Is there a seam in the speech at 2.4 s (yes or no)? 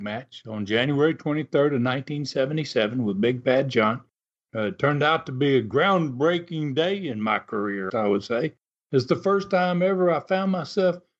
no